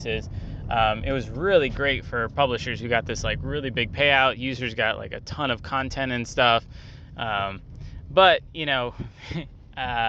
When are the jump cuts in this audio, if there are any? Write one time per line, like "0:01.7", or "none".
none